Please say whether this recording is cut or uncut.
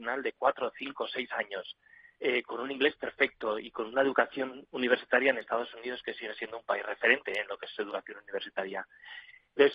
uncut